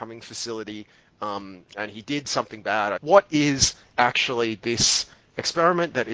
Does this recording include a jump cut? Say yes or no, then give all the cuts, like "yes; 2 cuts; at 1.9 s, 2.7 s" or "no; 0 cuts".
yes; 1 cut; at 3.0 s